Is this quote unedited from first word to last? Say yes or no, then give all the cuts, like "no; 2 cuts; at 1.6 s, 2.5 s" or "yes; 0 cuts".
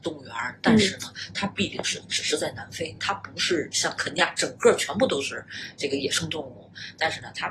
yes; 0 cuts